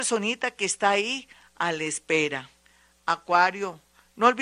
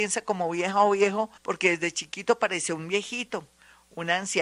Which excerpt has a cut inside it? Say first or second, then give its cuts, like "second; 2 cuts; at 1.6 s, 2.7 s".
second; 1 cut; at 1.4 s